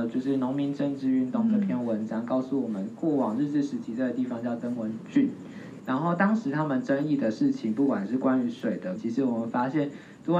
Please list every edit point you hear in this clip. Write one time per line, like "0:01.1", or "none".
0:05.8
0:09.0